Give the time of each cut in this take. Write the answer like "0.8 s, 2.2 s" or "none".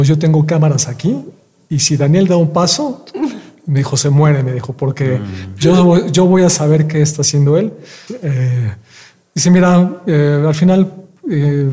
8.1 s